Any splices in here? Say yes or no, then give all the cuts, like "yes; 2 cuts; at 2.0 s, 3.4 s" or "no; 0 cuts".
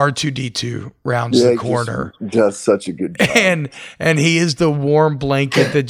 no; 0 cuts